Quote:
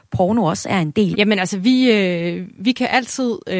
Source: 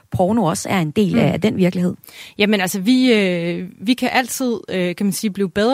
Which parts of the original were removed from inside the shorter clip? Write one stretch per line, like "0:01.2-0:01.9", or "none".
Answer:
0:01.1-0:02.3